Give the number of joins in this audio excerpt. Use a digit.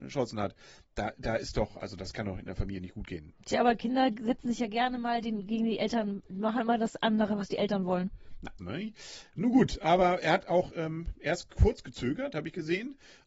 1